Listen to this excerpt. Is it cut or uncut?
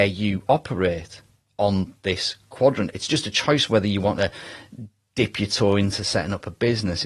uncut